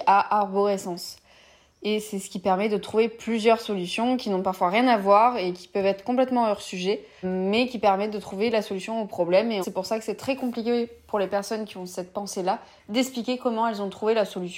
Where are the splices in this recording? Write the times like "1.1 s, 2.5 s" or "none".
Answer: 7.2 s, 9.6 s